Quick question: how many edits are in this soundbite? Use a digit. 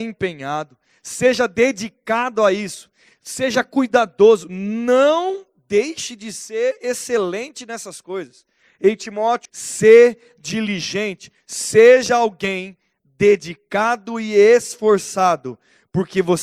1